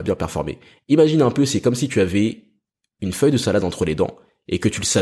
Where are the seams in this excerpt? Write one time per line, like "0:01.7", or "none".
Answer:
none